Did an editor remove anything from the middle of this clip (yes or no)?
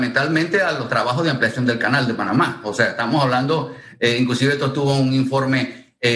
no